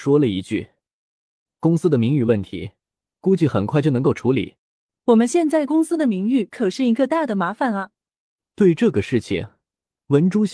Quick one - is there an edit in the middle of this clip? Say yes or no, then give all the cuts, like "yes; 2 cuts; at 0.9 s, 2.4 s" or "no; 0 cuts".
yes; 1 cut; at 4.6 s